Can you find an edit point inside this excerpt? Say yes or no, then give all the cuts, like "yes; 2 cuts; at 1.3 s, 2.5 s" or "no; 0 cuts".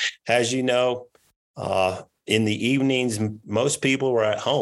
no; 0 cuts